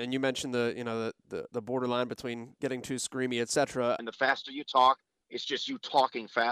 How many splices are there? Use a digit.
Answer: 2